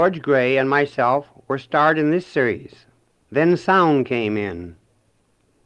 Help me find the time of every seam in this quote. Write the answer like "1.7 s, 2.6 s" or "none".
3.2 s